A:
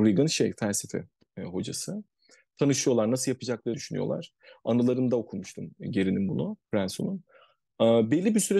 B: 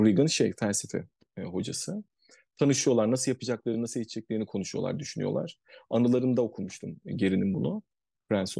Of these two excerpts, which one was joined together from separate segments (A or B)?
A